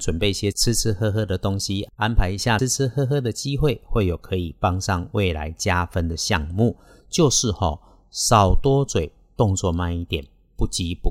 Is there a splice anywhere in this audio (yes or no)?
yes